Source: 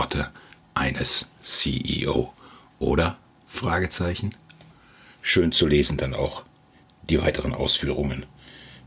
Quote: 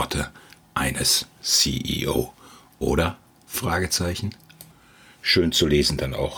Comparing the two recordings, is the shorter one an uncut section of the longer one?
yes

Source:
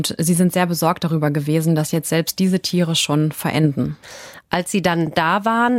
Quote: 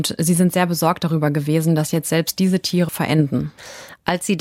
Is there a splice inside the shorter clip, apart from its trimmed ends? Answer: yes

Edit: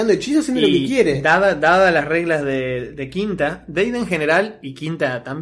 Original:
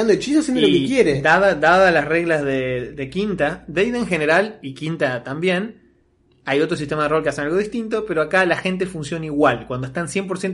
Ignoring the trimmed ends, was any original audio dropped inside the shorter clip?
no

